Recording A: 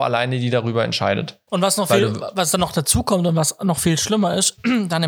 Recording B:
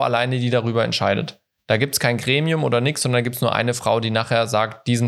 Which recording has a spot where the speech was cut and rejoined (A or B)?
A